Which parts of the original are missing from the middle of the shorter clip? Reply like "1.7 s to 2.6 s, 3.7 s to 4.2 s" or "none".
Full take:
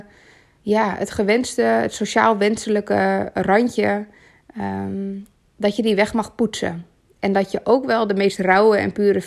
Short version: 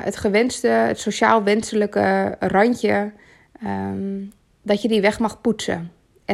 none